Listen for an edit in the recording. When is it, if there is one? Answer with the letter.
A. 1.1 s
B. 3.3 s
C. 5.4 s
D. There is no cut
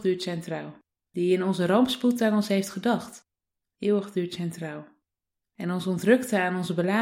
A